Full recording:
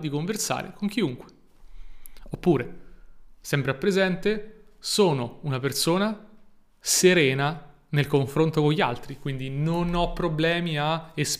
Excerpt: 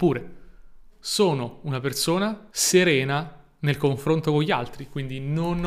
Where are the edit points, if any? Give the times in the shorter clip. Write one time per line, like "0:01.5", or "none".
0:00.9
0:02.5